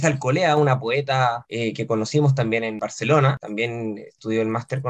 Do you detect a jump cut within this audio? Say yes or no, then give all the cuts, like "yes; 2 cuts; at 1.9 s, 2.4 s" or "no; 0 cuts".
no; 0 cuts